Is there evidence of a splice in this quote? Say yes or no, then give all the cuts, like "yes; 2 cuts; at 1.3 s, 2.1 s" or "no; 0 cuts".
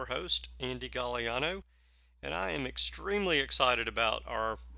no; 0 cuts